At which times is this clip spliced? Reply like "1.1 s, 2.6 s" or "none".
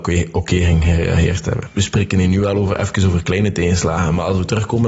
none